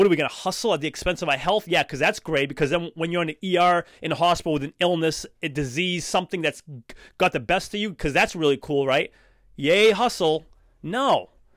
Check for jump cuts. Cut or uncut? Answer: uncut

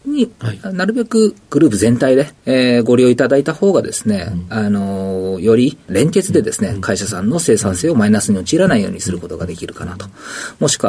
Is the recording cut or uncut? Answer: uncut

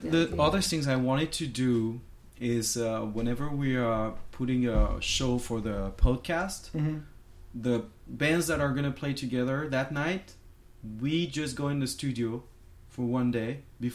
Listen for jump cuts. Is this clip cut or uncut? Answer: uncut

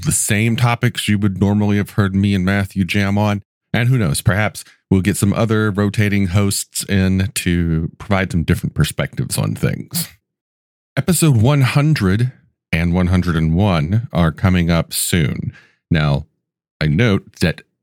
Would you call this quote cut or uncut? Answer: uncut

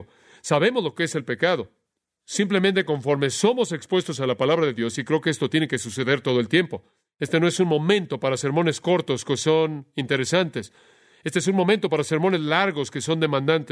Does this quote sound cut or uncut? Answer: uncut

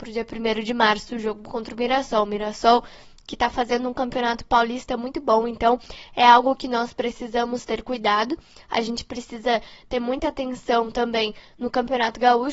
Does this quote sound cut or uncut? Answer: uncut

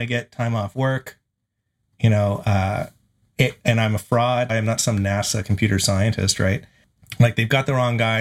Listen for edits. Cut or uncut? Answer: cut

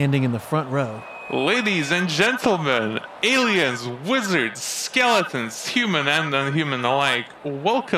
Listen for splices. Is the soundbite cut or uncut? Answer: uncut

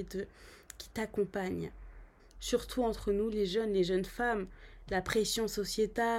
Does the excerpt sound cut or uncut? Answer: cut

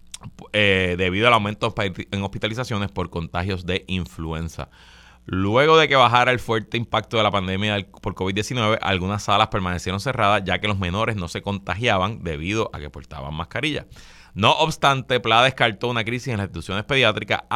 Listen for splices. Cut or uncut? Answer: uncut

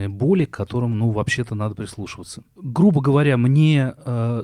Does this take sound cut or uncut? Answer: cut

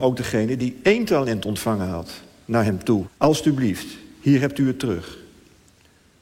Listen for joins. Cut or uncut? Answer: cut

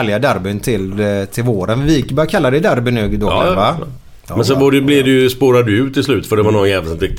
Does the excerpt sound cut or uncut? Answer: cut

